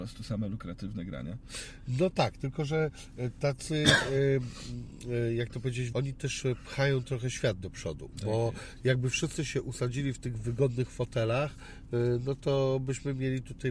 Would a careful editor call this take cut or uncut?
cut